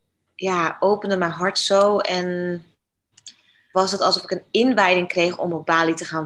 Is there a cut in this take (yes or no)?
yes